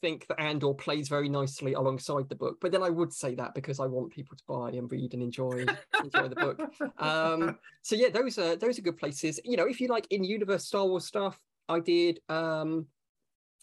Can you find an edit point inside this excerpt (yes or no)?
no